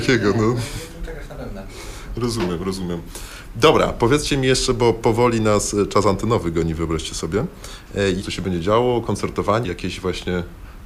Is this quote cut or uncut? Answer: cut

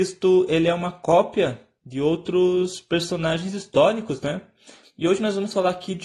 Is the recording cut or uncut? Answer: cut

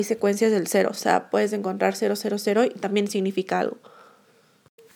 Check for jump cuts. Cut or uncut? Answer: uncut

